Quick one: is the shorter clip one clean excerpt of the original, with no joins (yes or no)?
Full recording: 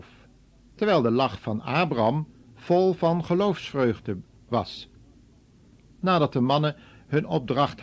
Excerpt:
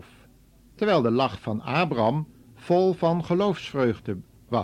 yes